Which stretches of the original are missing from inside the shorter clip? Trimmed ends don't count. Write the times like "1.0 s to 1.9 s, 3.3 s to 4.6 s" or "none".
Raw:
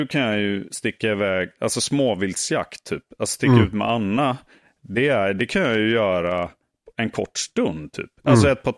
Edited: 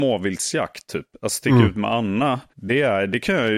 4.5 s to 4.8 s